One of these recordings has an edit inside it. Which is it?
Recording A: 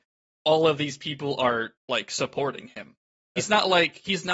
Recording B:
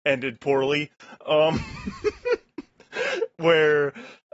A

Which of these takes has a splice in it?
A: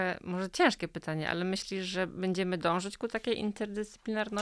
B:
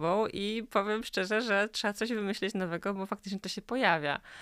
B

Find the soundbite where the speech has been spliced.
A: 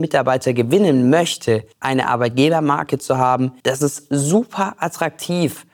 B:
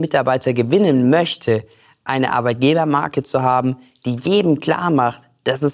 A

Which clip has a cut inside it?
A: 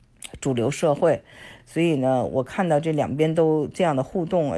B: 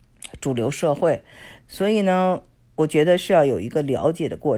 B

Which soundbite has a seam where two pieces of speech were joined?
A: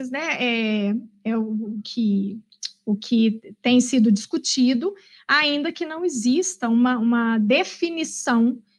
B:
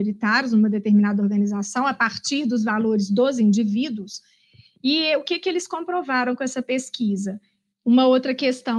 B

